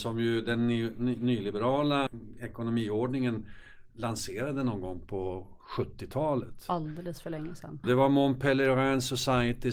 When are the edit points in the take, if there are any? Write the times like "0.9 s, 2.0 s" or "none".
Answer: 2.1 s, 7.8 s